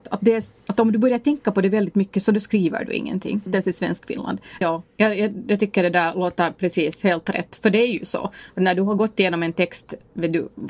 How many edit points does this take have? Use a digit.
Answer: 2